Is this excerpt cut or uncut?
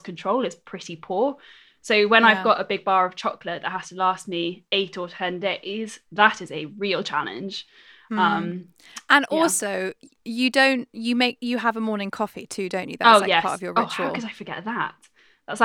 uncut